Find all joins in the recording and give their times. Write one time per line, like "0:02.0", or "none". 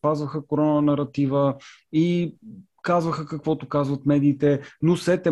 none